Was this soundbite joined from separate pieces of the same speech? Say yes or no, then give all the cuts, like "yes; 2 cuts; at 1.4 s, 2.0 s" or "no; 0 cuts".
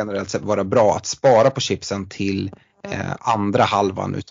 no; 0 cuts